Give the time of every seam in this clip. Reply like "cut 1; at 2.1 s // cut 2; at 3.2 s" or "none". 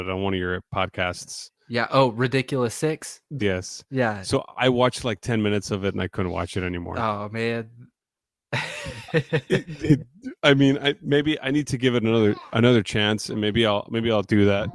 cut 1; at 3.4 s